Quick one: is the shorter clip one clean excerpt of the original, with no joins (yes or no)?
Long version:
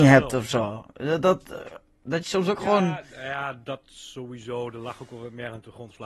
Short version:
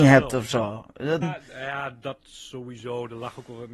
no